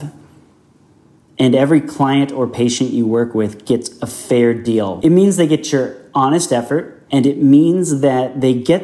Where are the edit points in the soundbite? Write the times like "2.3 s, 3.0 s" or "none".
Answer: 5.0 s, 7.1 s